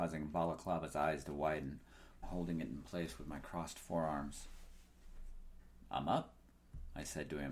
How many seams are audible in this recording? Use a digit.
1